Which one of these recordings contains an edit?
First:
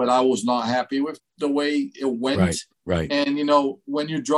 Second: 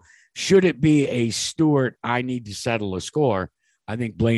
first; 1 cut; at 1.2 s

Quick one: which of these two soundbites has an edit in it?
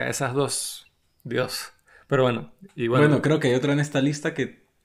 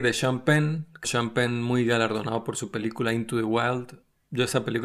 second; 1 cut; at 1.0 s

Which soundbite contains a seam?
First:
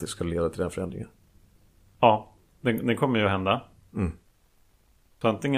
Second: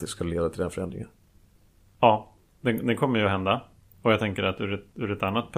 first; 1 cut; at 3.9 s

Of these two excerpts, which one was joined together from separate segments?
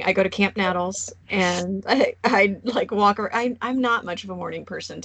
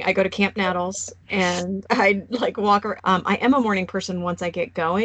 second; 2 cuts; at 1.8 s, 3.0 s

